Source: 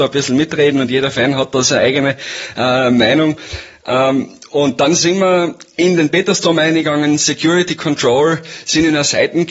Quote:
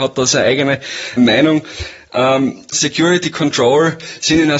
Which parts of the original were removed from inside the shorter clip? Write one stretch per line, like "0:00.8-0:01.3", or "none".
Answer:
0:02.5-0:02.9
0:04.5-0:07.2

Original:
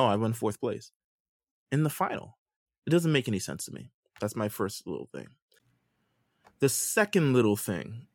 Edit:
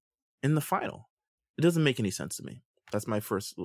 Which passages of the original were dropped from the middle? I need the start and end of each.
none

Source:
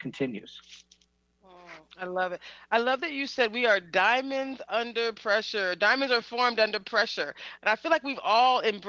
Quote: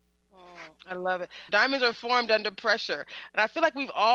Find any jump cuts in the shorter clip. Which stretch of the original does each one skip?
0:02.6-0:05.8

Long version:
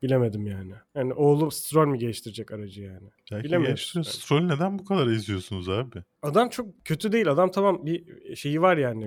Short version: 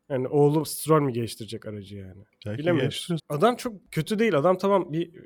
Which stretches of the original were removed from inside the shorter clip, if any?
0:04.0-0:06.1

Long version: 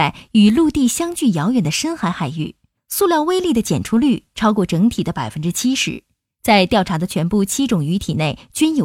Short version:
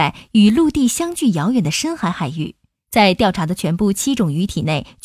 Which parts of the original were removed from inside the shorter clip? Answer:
0:02.7-0:06.2

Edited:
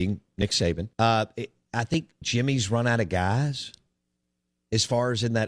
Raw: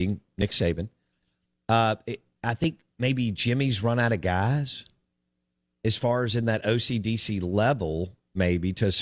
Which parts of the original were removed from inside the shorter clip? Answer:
0:00.9-0:01.6
0:02.9-0:03.3

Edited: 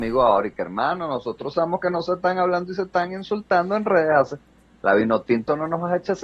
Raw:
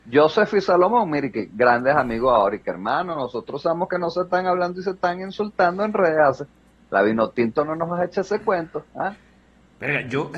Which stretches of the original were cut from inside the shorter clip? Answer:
none

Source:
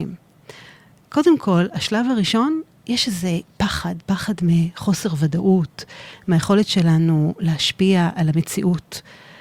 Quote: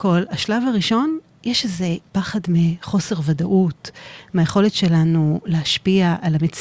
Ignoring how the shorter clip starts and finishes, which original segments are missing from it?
0:03.5-0:04.0

